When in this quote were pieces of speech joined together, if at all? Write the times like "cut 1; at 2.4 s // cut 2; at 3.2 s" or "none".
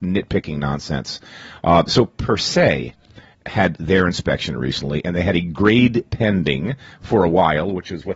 none